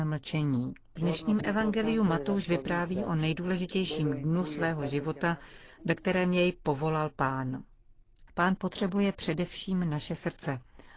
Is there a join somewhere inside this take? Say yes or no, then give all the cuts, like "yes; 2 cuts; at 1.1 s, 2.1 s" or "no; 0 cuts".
yes; 2 cuts; at 1.0 s, 8.3 s